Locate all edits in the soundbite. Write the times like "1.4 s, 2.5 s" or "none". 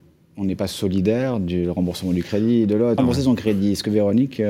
3.0 s